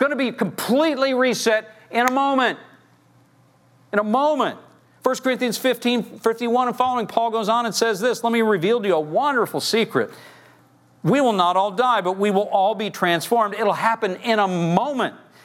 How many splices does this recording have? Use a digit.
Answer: 0